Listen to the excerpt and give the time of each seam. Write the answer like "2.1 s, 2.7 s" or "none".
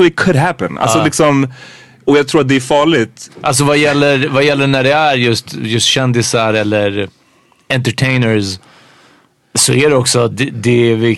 3.3 s